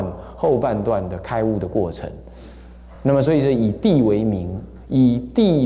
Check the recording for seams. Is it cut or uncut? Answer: uncut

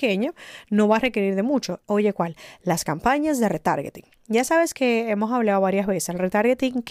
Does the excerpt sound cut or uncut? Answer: cut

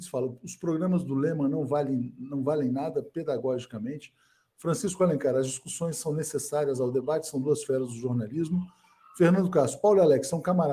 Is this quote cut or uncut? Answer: uncut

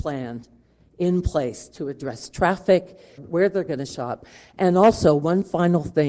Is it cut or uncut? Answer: cut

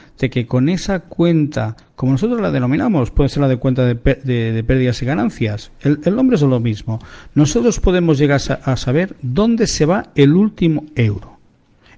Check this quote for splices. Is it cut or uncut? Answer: uncut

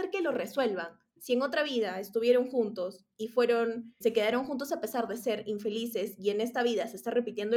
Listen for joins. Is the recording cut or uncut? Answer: cut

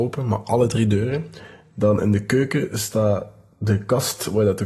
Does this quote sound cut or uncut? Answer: uncut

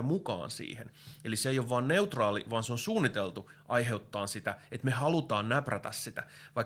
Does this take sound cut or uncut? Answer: uncut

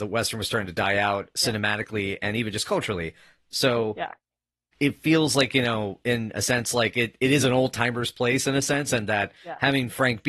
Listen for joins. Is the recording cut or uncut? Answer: uncut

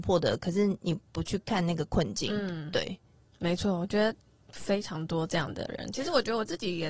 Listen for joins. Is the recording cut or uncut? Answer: uncut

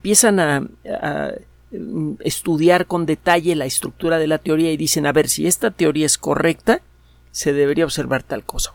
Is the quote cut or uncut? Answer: uncut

